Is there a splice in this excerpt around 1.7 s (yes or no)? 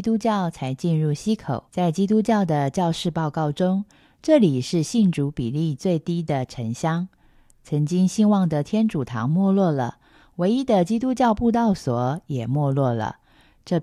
yes